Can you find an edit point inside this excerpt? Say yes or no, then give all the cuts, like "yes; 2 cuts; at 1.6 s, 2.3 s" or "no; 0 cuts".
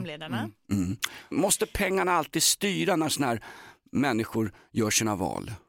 yes; 1 cut; at 1.3 s